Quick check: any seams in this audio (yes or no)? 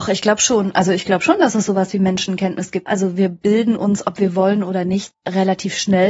yes